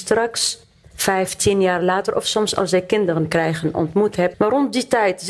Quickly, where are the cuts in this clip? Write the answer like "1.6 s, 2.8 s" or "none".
4.3 s